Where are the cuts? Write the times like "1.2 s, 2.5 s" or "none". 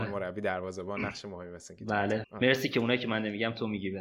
2.2 s